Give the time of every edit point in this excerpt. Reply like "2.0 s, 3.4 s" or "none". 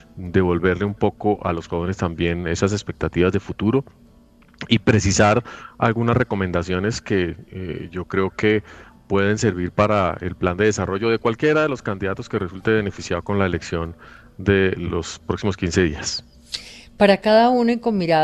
14.8 s